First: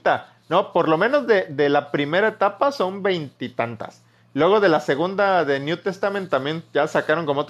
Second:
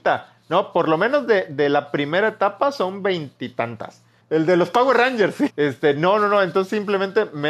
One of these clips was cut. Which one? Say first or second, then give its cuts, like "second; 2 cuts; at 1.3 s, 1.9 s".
second; 2 cuts; at 4.2 s, 5.5 s